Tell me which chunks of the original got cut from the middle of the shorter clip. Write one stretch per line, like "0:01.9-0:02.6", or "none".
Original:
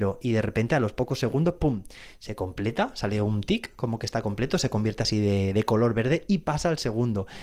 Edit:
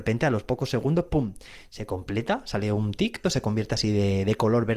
0:03.7-0:04.5